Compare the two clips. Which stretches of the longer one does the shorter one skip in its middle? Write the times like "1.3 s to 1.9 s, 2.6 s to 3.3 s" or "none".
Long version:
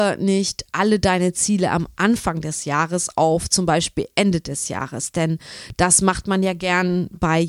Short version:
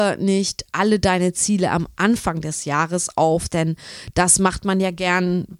3.5 s to 5.1 s